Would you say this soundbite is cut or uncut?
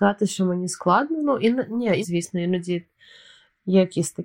cut